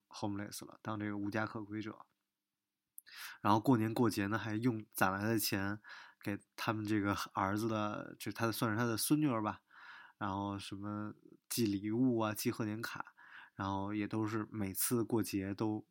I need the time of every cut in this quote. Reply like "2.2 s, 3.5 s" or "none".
none

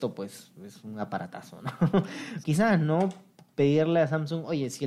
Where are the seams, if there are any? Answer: 2.4 s

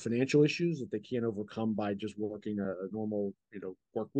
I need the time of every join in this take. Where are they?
none

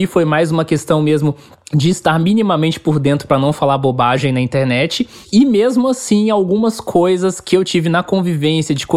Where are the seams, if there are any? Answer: none

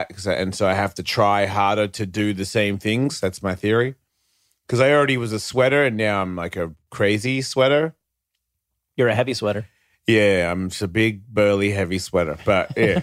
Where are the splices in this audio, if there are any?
none

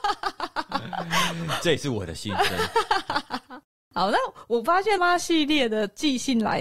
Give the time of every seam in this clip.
5.0 s

